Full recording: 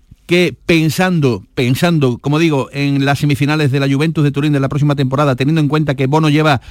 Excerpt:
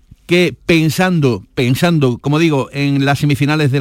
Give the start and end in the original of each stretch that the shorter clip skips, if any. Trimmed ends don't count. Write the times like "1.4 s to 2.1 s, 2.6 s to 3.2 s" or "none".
none